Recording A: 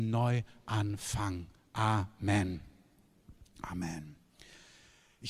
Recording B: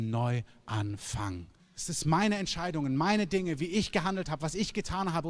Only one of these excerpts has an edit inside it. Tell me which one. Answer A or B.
B